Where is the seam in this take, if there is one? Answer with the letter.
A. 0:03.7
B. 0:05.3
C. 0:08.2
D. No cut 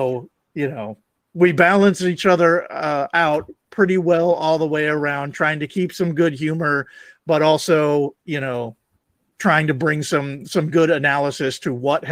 C